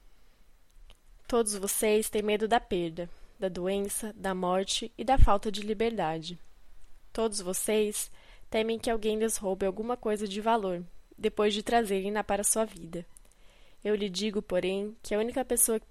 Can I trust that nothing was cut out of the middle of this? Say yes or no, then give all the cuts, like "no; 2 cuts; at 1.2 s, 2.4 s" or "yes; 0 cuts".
yes; 0 cuts